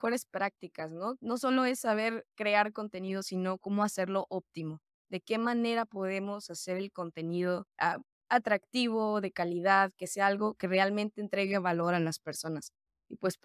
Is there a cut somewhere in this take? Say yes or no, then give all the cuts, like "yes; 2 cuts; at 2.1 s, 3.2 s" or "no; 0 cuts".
yes; 1 cut; at 7.7 s